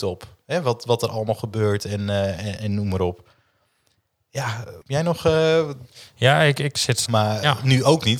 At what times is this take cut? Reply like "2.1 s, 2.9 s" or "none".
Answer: 2.6 s, 4.8 s, 7.1 s